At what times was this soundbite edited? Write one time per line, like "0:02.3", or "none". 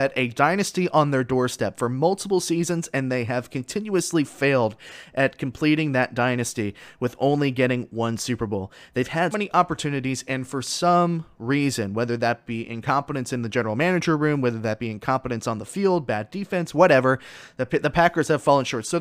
0:09.3